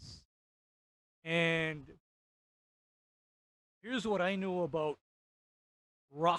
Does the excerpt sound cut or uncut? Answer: uncut